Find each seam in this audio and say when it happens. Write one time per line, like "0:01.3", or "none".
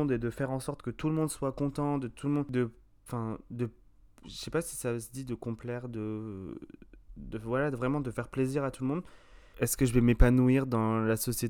0:09.5